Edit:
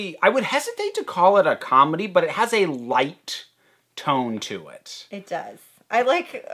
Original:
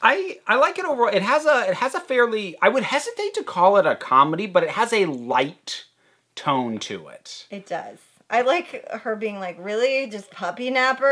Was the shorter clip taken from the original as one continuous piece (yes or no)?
yes